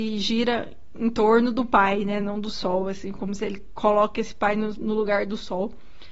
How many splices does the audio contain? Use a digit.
0